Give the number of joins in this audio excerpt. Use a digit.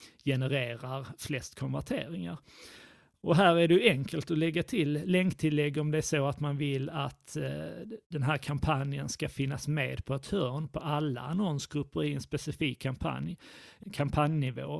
1